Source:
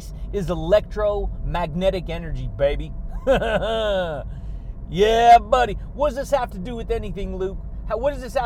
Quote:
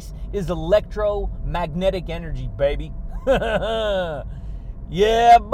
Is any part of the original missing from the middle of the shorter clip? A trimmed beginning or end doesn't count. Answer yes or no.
no